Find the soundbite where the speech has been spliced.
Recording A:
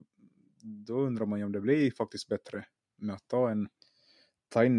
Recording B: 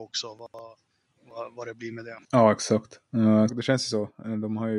B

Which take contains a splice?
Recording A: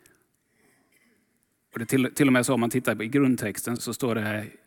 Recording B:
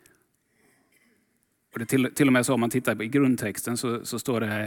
A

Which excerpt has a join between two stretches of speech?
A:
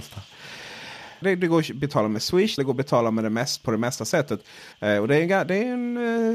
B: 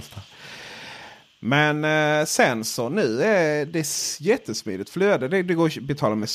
A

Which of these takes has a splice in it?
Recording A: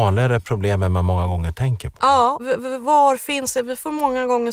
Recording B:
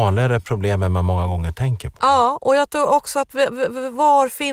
A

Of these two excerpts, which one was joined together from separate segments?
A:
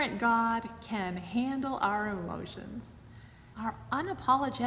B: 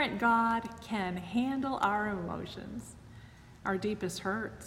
A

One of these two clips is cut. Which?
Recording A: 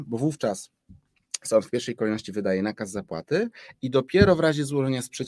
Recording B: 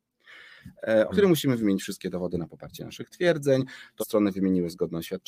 B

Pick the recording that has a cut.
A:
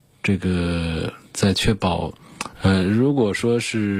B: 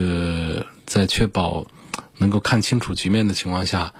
A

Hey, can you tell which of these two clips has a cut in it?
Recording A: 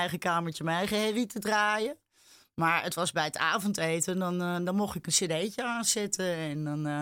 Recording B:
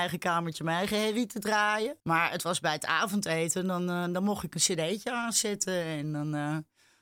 B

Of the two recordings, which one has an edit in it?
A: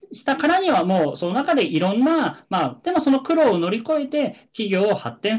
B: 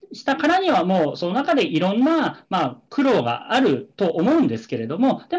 A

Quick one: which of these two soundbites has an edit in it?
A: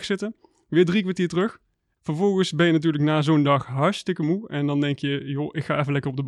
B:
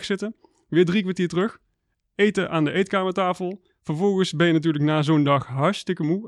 A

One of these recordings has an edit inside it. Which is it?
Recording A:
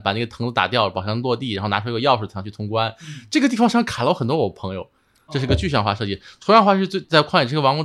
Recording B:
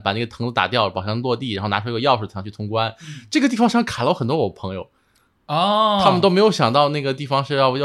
A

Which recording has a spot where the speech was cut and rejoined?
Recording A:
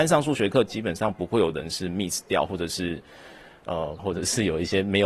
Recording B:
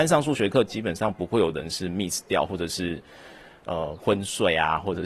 A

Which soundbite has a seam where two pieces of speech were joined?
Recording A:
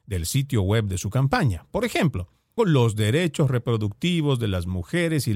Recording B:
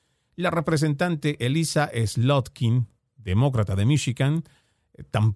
A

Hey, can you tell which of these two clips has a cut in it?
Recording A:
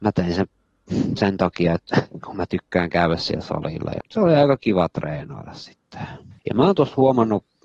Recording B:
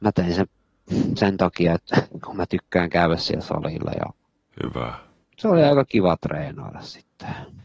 A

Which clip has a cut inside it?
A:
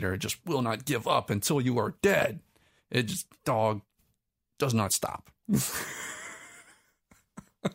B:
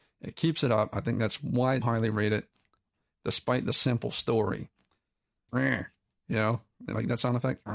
B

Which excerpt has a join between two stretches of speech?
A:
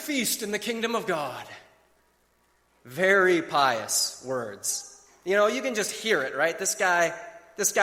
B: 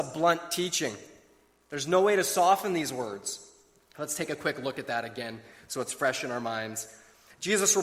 B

